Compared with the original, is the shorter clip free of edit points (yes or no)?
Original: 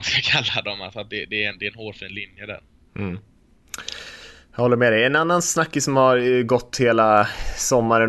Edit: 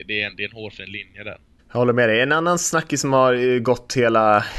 no